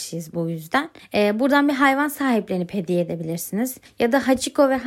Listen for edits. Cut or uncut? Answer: uncut